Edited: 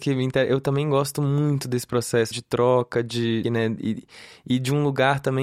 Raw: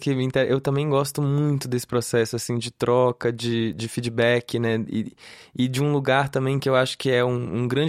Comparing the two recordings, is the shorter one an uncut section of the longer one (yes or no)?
no